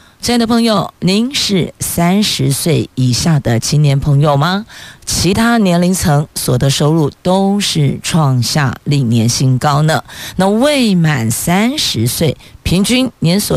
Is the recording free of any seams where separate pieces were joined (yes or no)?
no